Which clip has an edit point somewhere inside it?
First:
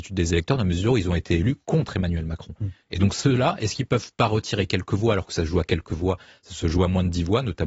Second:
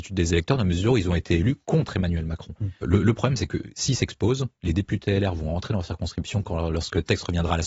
second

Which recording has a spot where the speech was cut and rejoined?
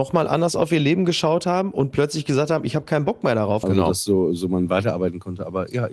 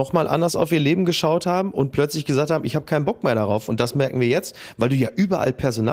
first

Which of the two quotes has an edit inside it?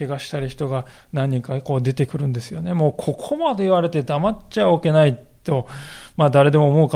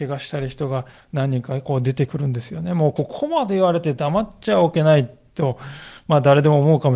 second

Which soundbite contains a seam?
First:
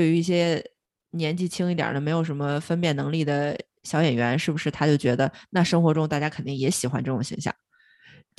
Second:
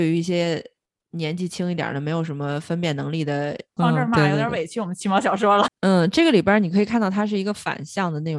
second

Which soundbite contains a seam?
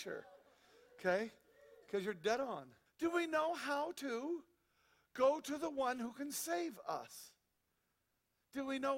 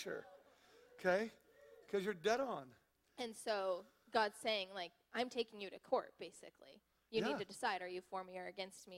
first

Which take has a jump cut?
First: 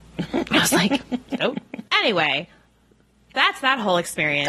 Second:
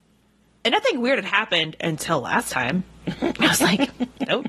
first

